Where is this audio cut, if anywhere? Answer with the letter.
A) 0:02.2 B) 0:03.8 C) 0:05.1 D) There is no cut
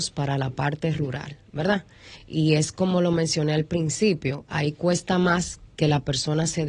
D